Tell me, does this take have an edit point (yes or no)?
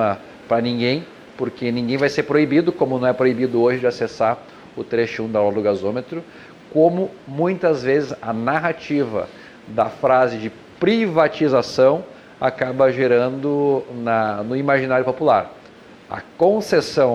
no